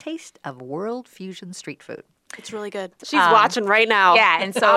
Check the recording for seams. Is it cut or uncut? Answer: cut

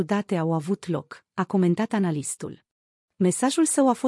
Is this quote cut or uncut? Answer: cut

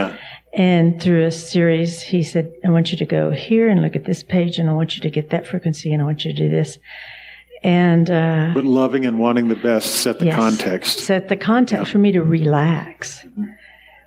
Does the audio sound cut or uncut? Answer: uncut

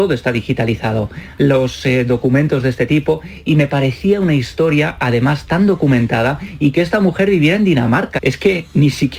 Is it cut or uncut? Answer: cut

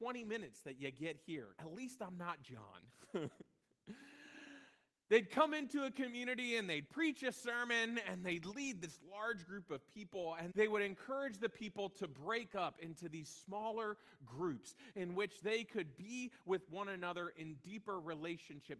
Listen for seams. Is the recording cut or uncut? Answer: cut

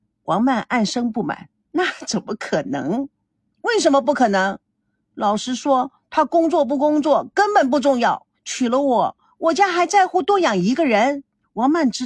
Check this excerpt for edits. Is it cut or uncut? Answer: uncut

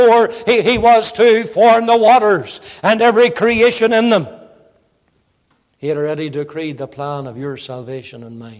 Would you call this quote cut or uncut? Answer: uncut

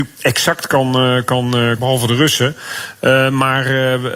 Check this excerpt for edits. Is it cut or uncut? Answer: cut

